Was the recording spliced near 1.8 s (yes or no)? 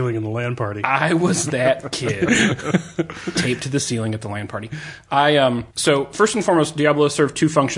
no